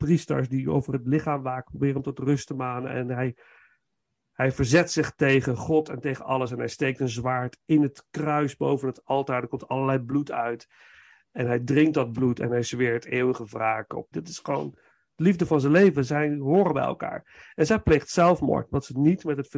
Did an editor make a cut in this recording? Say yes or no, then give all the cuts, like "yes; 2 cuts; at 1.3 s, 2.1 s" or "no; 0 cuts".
yes; 1 cut; at 14.1 s